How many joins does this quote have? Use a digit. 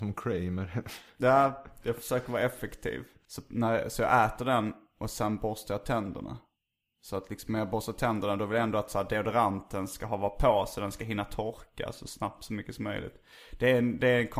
1